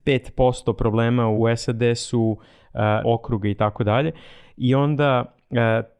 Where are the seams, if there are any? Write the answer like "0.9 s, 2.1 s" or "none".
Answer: 1.4 s, 3.0 s